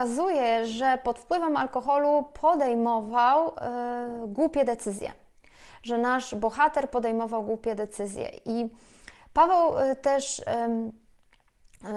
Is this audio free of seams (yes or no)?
yes